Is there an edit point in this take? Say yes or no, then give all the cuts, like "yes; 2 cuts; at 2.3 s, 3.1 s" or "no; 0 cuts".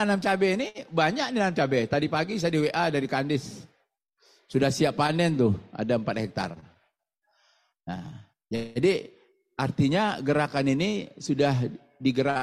no; 0 cuts